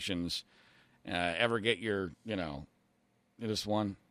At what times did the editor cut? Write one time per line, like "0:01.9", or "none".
0:02.1